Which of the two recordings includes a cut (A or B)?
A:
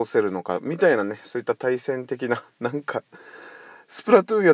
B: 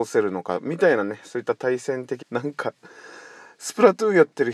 B